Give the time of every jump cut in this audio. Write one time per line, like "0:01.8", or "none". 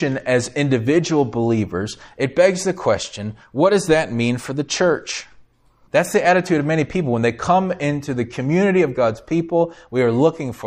0:05.8